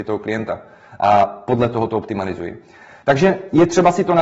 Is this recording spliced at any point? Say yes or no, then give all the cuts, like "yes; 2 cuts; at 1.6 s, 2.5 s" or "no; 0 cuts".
yes; 1 cut; at 3.0 s